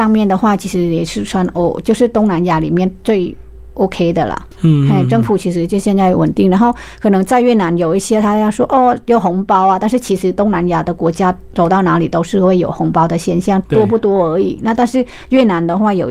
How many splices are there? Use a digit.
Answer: 1